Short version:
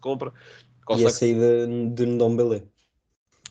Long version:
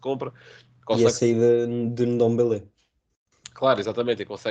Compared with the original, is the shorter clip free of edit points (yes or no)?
yes